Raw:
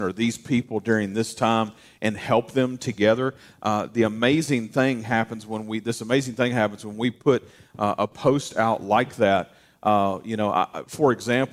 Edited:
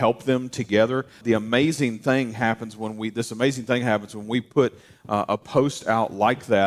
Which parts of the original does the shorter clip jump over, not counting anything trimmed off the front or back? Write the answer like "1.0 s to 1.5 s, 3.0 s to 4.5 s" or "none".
3.5 s to 3.9 s